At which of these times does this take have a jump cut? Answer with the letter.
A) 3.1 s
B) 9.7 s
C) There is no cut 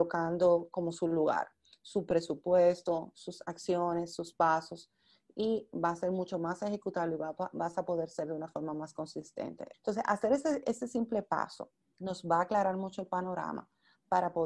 B